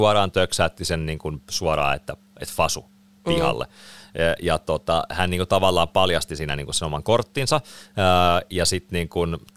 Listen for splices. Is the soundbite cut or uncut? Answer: uncut